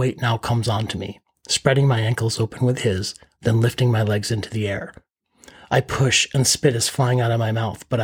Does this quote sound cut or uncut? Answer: uncut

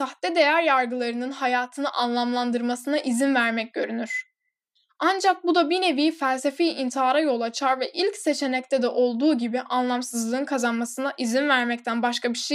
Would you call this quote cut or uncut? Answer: uncut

